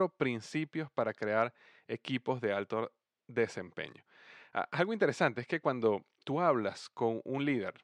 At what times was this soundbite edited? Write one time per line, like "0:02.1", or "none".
0:06.2